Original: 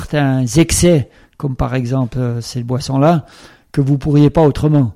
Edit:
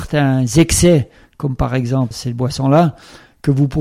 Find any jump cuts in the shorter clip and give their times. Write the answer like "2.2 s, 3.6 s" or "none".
2.1 s